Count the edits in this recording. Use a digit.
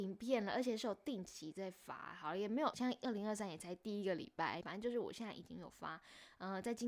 2